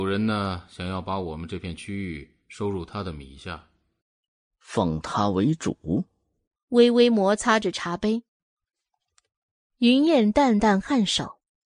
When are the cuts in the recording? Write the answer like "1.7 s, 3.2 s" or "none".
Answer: 6.6 s